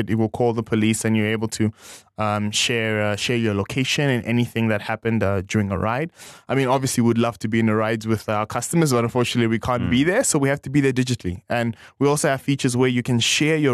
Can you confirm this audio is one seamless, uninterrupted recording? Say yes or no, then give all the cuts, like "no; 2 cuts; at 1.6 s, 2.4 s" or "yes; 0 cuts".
yes; 0 cuts